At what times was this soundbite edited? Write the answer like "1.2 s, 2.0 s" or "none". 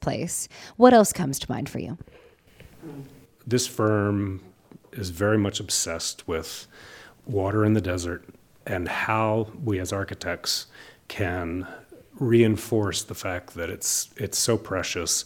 2.8 s